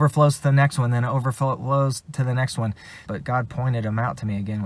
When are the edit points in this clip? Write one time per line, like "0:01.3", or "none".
0:03.0